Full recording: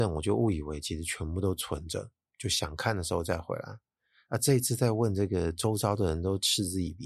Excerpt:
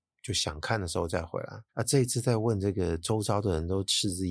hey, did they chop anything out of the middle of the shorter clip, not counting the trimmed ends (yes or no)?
yes